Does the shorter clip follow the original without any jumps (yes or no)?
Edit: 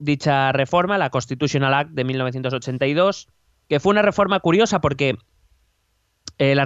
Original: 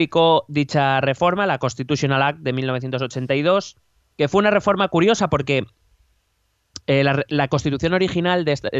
yes